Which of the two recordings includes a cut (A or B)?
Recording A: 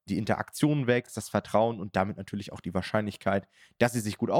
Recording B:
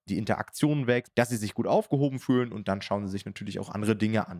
B